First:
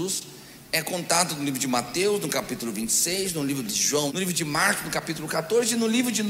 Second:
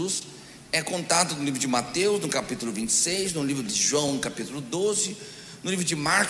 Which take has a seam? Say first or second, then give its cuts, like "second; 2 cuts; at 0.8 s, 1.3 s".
first; 1 cut; at 4.1 s